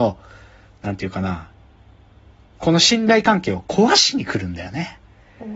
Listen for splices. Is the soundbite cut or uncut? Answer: uncut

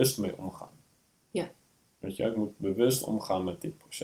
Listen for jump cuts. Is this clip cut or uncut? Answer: uncut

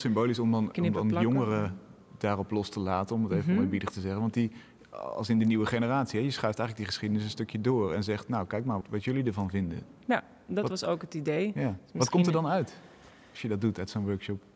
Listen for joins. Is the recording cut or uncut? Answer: cut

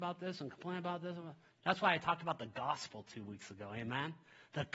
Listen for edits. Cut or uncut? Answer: cut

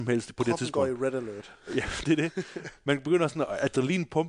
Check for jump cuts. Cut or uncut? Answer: uncut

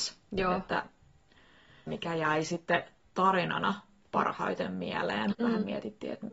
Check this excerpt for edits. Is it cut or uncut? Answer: cut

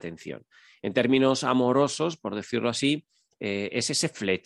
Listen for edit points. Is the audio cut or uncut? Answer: uncut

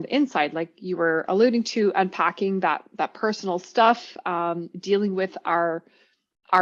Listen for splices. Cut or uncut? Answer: uncut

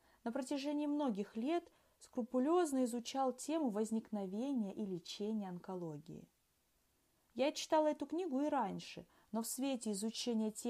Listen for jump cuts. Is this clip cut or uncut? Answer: uncut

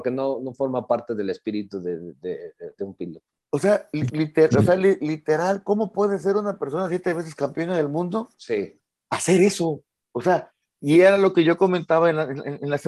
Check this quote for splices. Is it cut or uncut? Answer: uncut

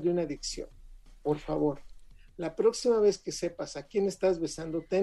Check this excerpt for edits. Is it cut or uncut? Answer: uncut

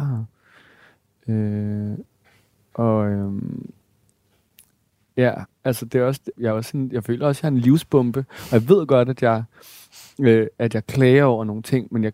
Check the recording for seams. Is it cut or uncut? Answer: cut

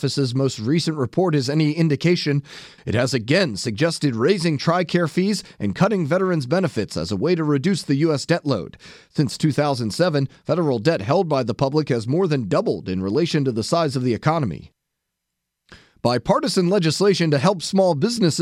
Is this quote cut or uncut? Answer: cut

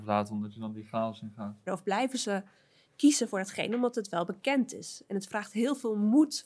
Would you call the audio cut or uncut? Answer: cut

